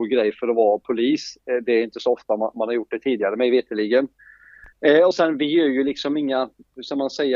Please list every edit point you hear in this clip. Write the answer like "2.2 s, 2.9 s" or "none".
none